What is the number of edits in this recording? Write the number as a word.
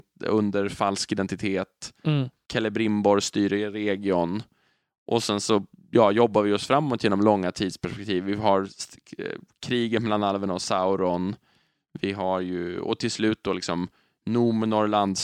zero